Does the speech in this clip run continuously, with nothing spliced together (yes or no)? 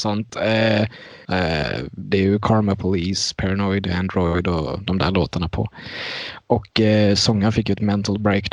no